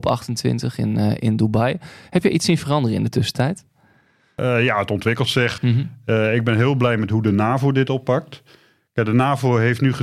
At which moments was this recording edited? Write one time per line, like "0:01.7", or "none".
0:05.6